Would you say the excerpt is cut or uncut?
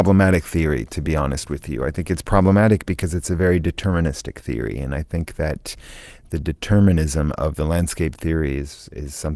uncut